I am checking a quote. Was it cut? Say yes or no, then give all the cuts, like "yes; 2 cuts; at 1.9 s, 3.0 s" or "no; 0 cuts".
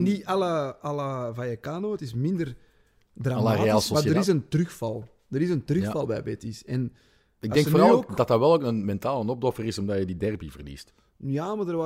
no; 0 cuts